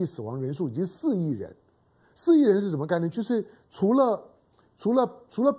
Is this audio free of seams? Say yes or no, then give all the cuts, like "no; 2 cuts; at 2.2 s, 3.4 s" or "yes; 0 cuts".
yes; 0 cuts